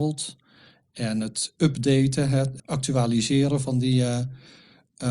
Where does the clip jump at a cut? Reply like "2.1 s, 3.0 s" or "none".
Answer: 2.6 s